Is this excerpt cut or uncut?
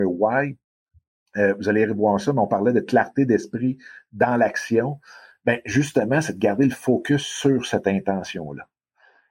uncut